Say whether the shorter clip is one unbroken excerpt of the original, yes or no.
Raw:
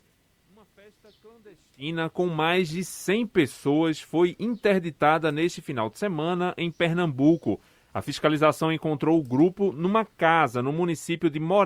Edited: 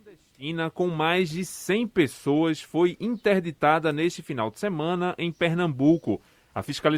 yes